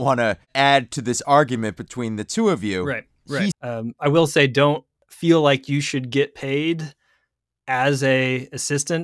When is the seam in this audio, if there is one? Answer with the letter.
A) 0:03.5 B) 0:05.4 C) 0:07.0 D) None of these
A